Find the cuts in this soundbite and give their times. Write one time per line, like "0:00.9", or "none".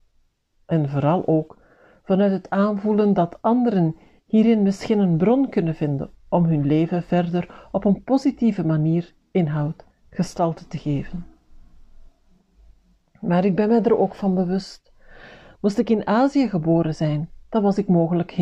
none